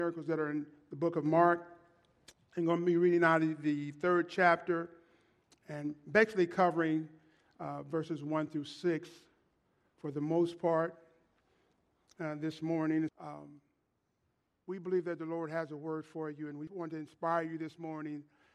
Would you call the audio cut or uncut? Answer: cut